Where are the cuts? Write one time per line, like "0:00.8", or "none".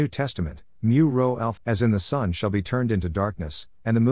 0:01.6